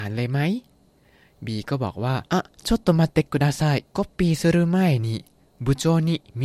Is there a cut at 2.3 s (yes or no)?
yes